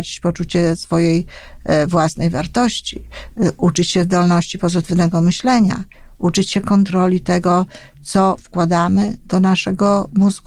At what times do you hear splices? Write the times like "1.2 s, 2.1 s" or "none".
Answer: none